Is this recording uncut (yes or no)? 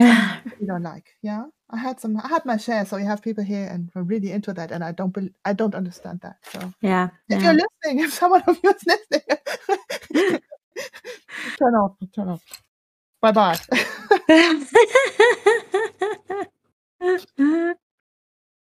yes